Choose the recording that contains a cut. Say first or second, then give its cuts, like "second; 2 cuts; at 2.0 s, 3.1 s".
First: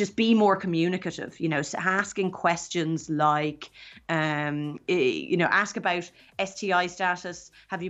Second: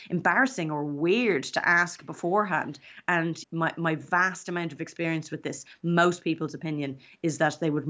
second; 1 cut; at 3.4 s